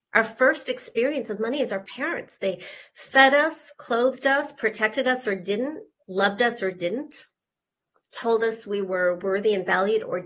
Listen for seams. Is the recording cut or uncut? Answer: uncut